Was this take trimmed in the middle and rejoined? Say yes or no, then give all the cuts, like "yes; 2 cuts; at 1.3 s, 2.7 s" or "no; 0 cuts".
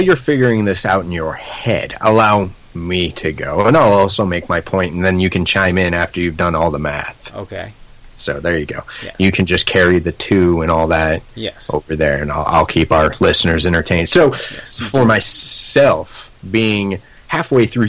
no; 0 cuts